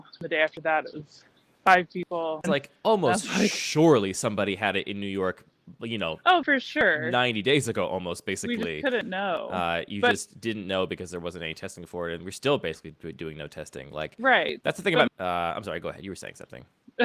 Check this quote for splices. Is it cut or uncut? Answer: cut